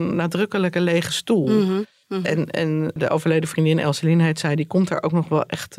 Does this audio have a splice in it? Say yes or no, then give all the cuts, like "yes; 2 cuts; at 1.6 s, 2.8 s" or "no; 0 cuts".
no; 0 cuts